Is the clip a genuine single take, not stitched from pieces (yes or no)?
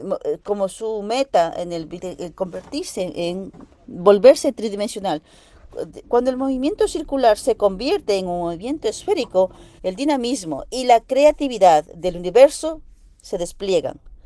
no